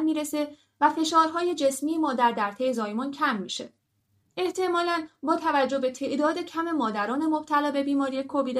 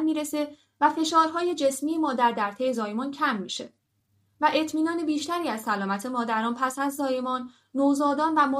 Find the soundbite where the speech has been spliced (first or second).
first